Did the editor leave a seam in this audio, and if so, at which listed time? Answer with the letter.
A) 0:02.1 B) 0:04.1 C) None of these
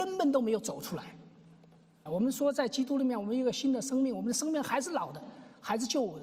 A